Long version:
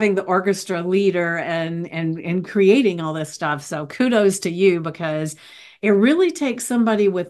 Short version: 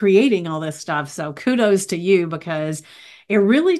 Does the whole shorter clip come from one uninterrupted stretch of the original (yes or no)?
yes